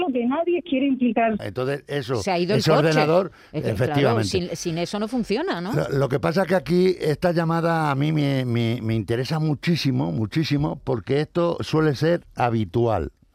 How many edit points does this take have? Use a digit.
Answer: 1